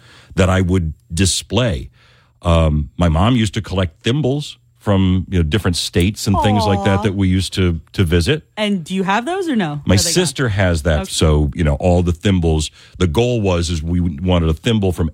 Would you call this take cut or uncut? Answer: cut